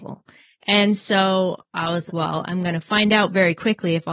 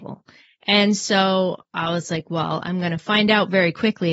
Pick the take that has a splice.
first; 1 cut; at 2.1 s

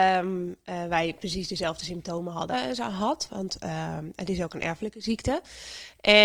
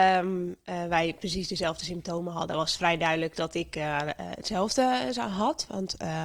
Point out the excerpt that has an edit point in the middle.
first; 1 cut; at 2.5 s

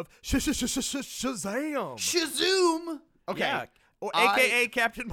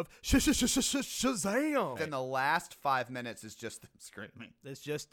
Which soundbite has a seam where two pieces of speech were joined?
second; 1 cut; at 2.0 s

